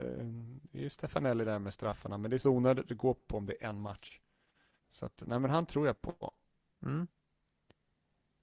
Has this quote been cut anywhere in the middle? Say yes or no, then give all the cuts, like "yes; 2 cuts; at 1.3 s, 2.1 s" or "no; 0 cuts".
yes; 1 cut; at 4.8 s